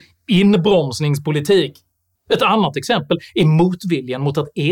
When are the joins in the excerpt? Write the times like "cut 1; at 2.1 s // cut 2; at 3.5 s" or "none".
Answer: cut 1; at 2.2 s